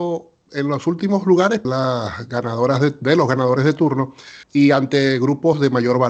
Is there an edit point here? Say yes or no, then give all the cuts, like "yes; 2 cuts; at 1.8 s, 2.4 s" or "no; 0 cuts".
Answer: yes; 2 cuts; at 1.6 s, 4.4 s